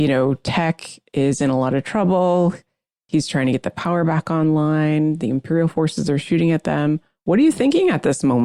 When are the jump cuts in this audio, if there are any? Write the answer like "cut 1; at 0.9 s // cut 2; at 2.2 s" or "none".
none